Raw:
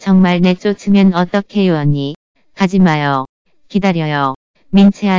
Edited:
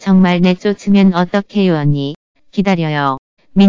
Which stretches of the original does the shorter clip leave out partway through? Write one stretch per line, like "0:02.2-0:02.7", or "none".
0:02.4-0:03.6

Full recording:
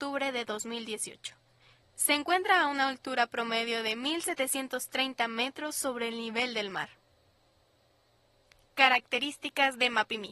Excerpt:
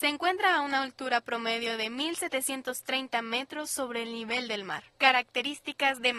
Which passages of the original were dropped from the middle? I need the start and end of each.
0:06.9-0:08.7

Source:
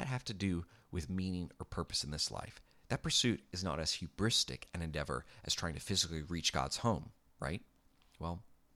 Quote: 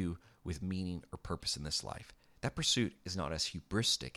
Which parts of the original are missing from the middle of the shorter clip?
none

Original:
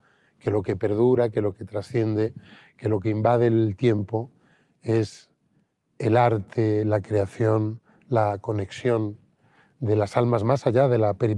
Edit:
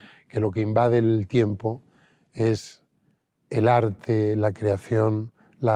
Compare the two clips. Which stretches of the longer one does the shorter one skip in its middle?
none

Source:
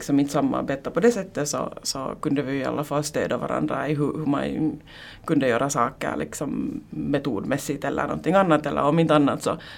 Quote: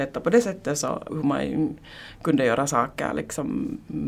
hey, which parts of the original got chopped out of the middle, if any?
0:01.8-0:04.1

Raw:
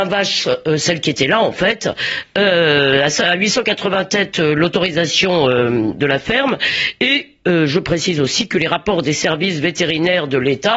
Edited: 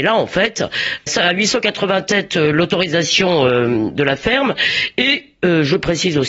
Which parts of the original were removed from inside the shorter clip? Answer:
0:02.3-0:03.1

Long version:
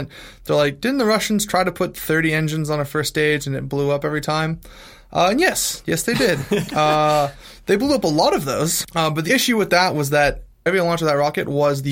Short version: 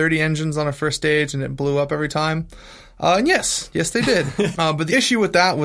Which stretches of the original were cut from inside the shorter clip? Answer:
0:06.7-0:08.9

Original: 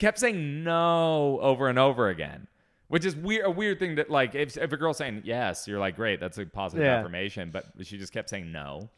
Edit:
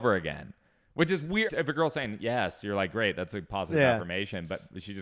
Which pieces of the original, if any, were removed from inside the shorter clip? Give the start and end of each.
0:03.4-0:04.5

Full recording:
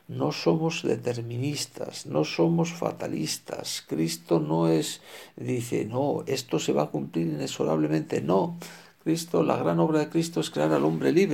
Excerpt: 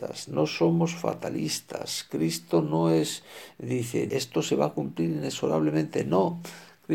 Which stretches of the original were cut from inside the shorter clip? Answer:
0:05.9-0:06.3

